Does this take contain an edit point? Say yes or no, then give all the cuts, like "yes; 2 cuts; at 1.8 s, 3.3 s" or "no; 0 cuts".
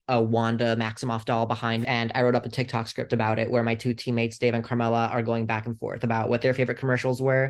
yes; 1 cut; at 1.8 s